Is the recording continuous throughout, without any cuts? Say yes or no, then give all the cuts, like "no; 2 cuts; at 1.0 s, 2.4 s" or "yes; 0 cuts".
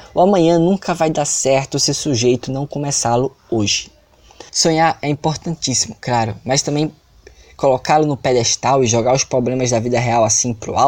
no; 1 cut; at 4.5 s